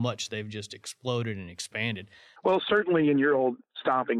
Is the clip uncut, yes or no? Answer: no